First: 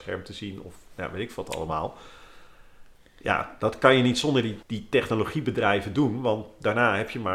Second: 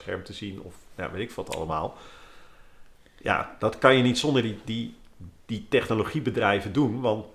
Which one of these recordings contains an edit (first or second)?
first